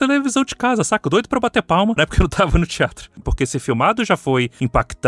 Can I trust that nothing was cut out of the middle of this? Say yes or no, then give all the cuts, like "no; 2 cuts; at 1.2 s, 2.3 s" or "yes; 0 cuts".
no; 2 cuts; at 2.0 s, 3.2 s